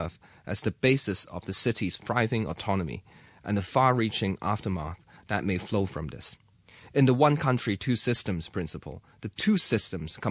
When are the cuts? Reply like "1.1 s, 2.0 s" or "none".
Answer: none